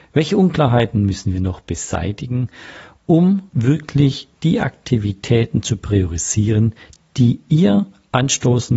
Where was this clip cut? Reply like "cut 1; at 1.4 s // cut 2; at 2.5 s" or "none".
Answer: cut 1; at 3.5 s